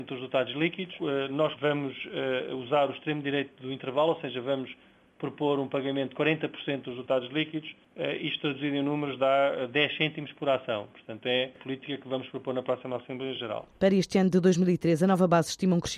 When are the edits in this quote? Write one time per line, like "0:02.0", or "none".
0:01.6